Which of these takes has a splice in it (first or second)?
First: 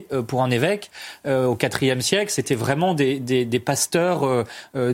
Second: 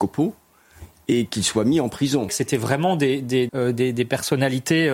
second